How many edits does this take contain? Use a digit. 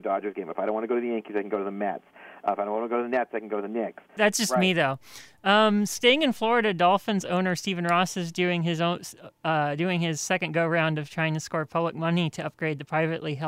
1